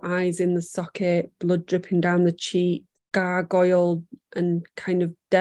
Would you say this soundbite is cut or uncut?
cut